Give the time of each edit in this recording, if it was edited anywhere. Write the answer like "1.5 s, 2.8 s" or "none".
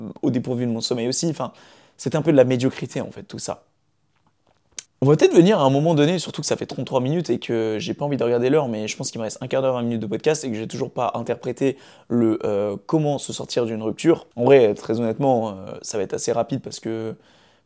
4.9 s, 14.3 s